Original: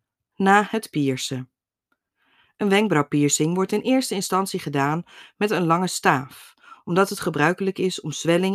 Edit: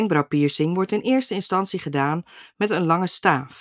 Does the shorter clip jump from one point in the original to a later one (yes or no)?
no